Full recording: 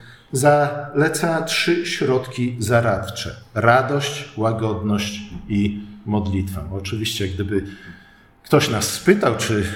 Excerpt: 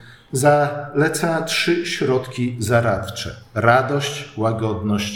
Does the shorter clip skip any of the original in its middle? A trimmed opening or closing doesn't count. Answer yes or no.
no